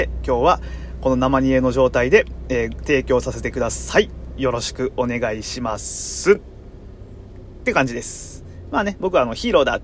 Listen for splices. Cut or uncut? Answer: uncut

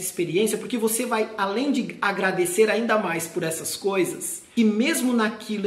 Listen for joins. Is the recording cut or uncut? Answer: cut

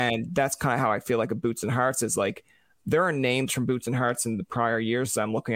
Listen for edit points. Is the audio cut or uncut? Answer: uncut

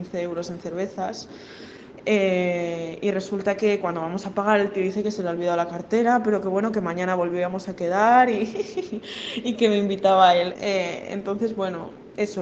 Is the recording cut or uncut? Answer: cut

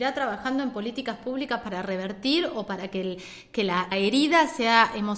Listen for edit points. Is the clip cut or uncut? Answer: cut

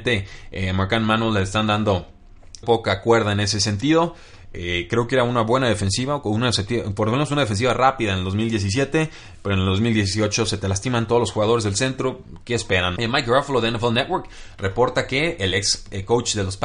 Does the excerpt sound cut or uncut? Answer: cut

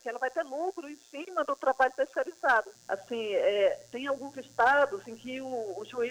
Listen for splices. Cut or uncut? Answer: cut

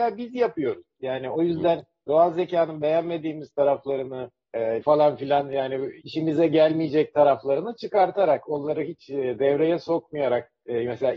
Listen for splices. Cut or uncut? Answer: cut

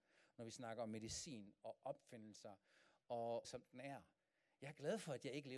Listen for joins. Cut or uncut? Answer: cut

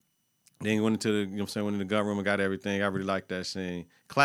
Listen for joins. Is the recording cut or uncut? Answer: uncut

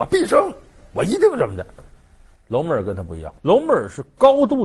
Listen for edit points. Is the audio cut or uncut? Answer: cut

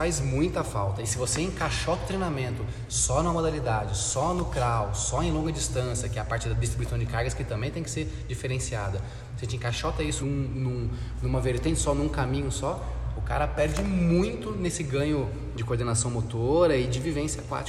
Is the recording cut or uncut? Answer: cut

